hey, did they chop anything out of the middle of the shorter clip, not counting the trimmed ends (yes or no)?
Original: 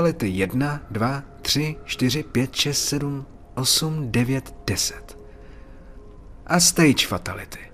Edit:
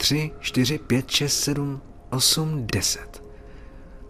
yes